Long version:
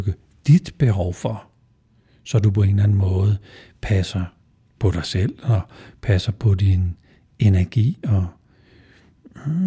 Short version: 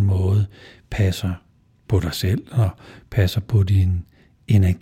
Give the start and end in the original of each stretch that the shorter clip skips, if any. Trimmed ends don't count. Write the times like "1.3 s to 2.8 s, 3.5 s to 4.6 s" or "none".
none